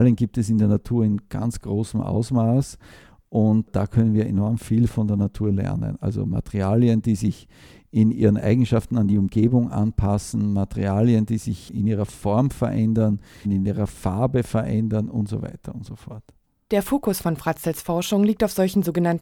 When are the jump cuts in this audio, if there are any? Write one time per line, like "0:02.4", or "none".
0:13.4